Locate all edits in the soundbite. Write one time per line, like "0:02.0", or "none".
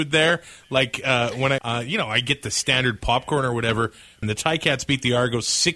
0:01.6
0:04.2